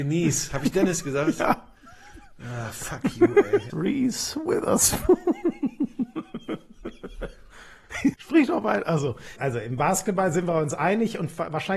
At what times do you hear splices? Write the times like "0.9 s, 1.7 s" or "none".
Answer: 3.7 s, 8.1 s, 9.4 s